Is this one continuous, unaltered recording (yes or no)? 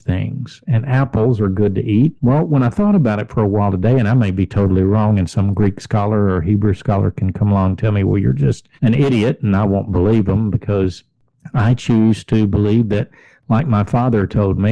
no